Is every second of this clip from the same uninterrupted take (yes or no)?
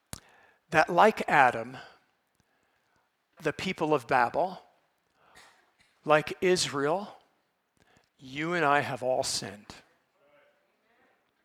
no